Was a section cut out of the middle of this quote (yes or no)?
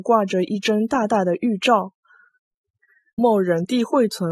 yes